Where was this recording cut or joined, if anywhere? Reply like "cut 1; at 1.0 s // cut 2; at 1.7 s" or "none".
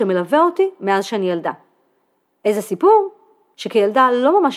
cut 1; at 3.5 s

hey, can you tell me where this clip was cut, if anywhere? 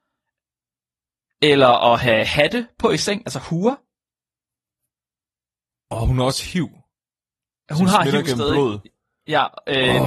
none

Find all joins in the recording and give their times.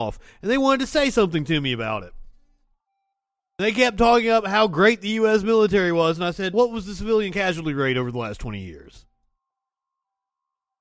cut 1; at 6.5 s

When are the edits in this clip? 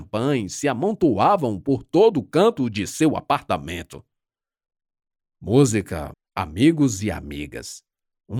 cut 1; at 6.1 s

